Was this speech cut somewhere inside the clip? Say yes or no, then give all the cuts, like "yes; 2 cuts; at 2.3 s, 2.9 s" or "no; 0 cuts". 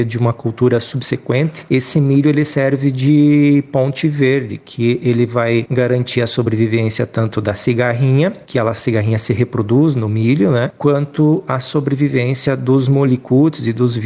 no; 0 cuts